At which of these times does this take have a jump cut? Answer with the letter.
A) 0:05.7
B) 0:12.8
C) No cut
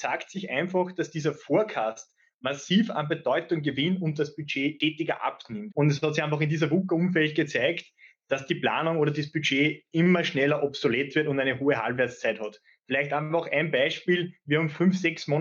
A